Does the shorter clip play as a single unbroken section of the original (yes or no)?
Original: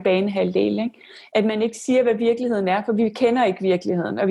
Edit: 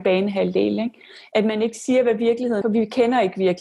no